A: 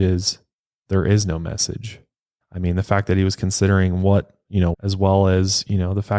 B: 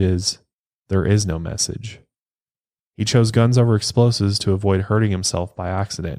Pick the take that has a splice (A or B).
A